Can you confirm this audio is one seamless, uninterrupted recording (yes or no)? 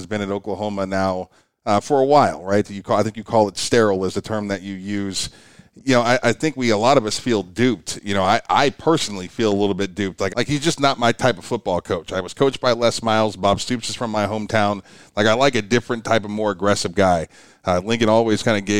no